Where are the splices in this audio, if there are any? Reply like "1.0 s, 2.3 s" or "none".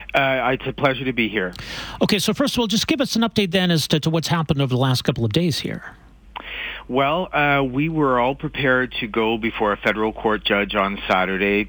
none

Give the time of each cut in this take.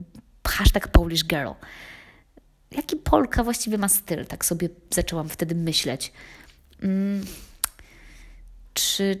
none

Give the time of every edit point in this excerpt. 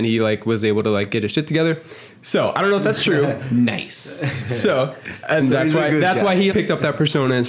5.4 s, 6.5 s

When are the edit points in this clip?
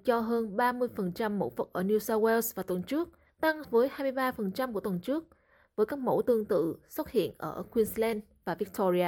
3.6 s

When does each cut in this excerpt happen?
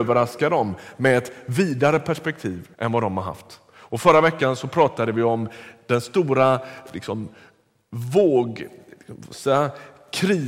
2.7 s

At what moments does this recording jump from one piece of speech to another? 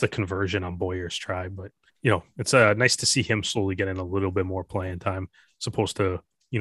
1.9 s

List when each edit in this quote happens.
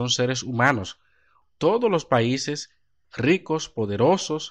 1.4 s, 3.0 s

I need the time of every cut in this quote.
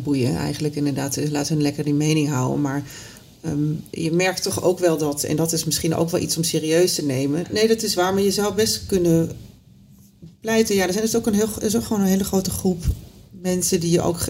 7.4 s

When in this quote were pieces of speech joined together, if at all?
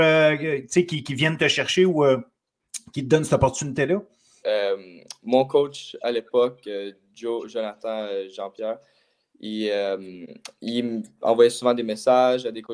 4.4 s

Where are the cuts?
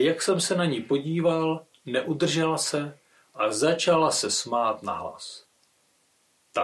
none

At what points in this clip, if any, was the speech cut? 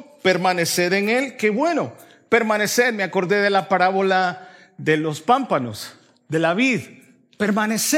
none

